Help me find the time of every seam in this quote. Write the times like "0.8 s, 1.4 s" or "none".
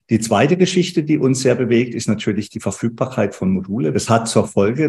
3.9 s